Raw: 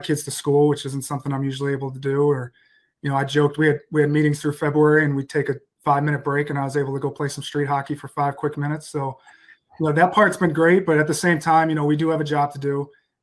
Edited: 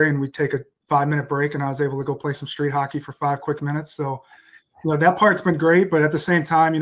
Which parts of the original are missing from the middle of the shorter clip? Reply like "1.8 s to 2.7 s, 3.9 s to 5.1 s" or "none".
none